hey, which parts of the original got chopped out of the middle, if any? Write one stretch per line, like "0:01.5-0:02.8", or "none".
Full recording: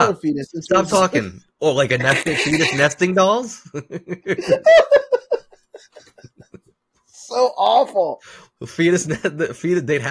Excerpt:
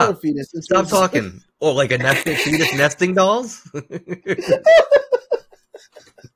none